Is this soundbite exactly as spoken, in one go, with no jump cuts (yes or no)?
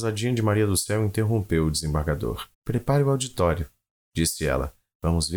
no